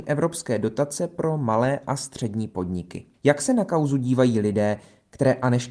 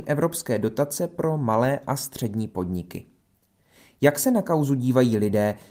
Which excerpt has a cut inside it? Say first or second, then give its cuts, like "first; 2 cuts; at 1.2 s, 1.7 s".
first; 1 cut; at 3.1 s